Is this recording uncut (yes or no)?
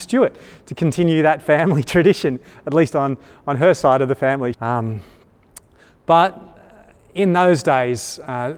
no